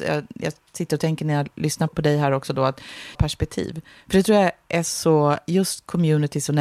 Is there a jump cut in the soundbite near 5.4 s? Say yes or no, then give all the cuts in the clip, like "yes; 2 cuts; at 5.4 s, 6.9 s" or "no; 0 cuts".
no; 2 cuts; at 1.9 s, 3.1 s